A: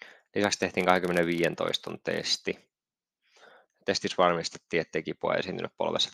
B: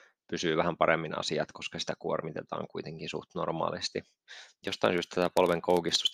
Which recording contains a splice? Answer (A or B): B